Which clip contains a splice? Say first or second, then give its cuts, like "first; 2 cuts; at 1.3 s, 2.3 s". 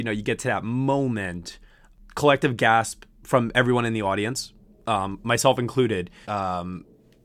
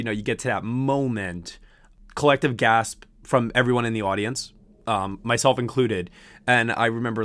first; 1 cut; at 6.2 s